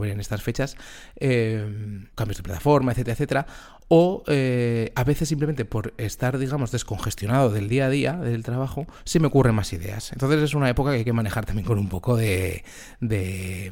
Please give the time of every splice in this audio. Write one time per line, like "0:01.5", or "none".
0:02.1